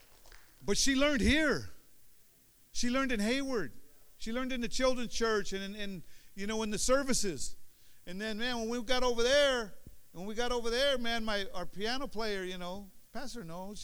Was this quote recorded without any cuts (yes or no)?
yes